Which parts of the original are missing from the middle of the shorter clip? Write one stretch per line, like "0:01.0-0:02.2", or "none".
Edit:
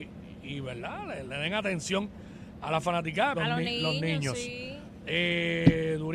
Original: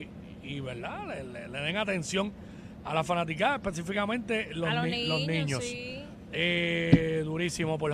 0:01.3-0:01.5
0:03.6-0:04.6